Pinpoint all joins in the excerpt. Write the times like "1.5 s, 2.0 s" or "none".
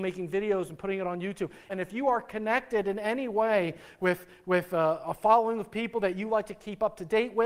1.7 s